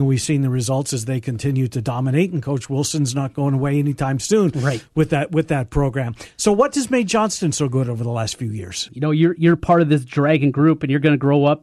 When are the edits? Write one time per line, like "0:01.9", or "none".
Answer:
0:08.9